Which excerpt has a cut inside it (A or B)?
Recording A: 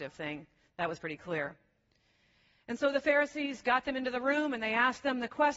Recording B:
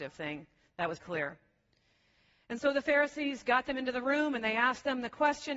B